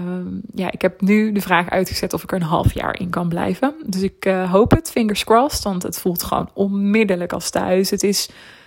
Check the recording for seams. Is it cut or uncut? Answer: uncut